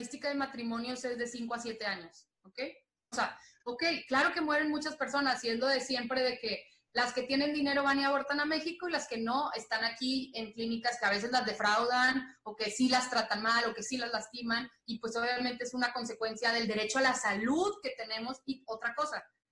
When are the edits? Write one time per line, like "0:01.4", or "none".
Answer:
0:03.1